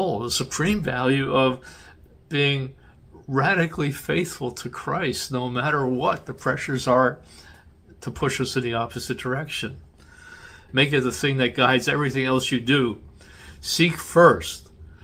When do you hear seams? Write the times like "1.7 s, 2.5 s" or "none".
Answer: 10.7 s